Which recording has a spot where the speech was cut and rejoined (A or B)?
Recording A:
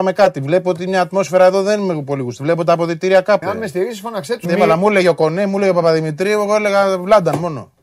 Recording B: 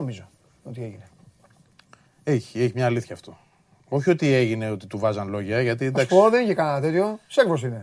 A